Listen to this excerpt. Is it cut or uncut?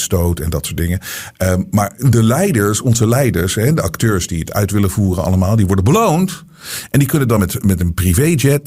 uncut